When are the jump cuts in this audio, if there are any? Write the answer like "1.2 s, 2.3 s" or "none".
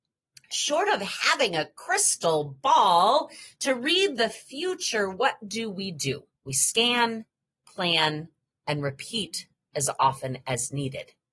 6.4 s, 8.5 s